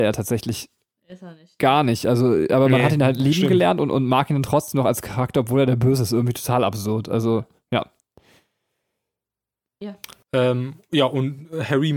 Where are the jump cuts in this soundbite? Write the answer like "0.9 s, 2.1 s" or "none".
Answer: 10.2 s